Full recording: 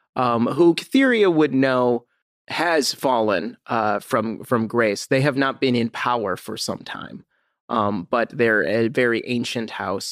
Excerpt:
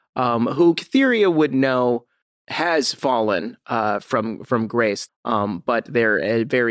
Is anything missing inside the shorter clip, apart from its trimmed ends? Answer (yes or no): yes